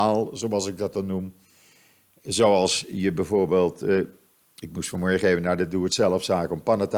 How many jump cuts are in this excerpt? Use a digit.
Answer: 0